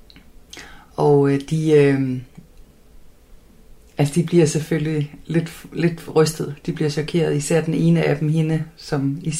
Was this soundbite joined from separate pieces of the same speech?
no; 0 cuts

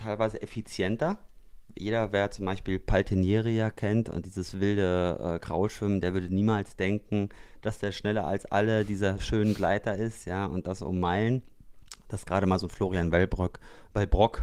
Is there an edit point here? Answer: no; 0 cuts

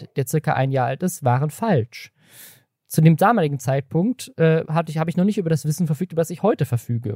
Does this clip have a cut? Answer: no; 0 cuts

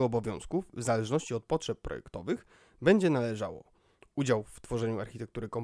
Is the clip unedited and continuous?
yes; 0 cuts

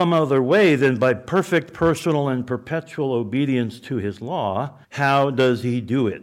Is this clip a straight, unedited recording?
no; 1 cut; at 4.8 s

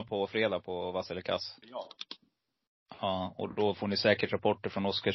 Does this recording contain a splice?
yes; 1 cut; at 1.6 s

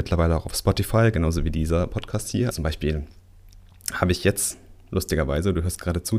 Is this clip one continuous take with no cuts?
no; 1 cut; at 2.5 s

